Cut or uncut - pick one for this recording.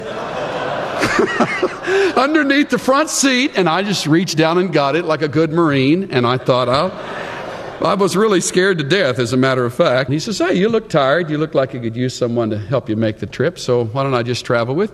cut